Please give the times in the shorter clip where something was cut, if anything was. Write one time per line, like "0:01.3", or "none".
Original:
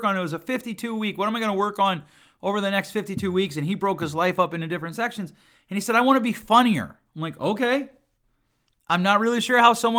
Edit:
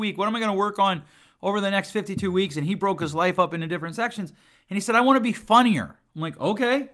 none